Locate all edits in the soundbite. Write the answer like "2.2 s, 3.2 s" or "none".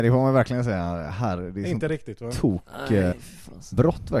3.1 s